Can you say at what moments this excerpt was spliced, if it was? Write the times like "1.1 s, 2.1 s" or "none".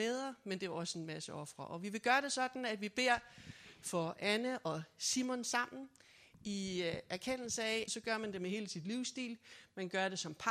7.9 s